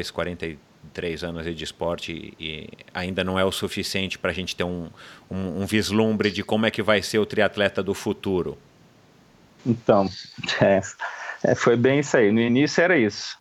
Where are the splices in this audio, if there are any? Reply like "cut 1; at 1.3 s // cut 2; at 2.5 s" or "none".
cut 1; at 9.6 s